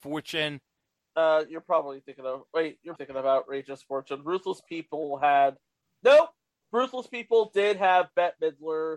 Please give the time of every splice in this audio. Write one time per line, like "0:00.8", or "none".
0:03.0